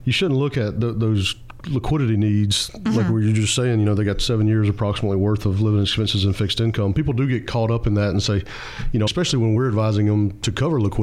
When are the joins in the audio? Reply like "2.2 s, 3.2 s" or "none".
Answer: 9.1 s